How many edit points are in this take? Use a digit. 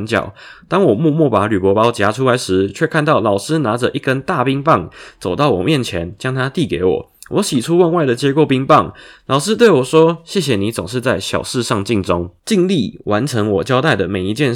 0